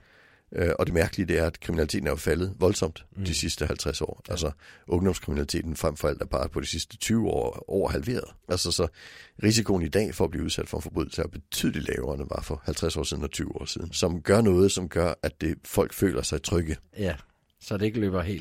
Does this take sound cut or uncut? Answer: cut